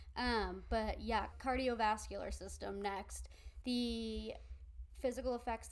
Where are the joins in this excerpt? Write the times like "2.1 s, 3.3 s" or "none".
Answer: 1.3 s, 3.6 s